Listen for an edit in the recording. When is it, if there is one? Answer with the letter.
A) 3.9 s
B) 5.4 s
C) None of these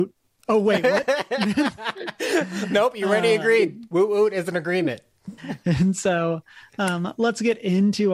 B